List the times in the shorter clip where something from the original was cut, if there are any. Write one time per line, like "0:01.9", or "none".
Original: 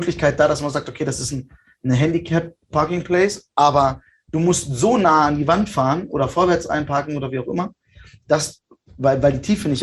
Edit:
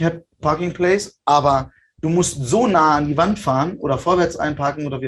none